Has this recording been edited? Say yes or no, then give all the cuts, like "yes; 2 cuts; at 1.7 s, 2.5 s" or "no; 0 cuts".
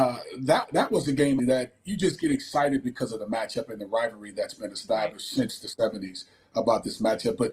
yes; 1 cut; at 1.4 s